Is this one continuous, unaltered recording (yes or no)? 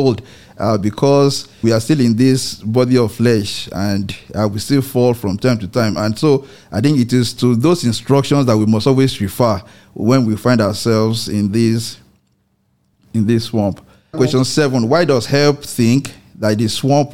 no